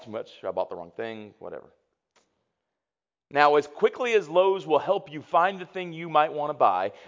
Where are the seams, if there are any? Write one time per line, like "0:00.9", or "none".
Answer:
none